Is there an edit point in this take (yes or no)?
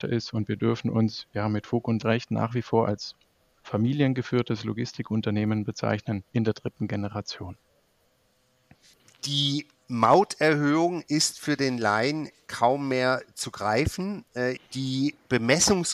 yes